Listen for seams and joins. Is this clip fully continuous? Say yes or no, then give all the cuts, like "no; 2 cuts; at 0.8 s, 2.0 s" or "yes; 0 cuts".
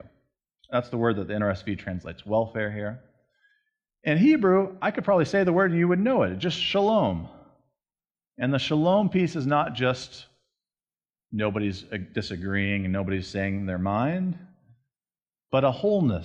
no; 1 cut; at 8.3 s